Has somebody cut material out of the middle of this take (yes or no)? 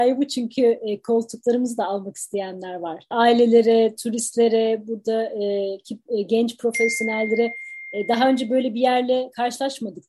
yes